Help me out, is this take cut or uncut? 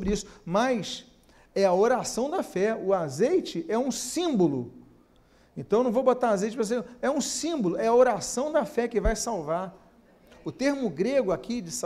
uncut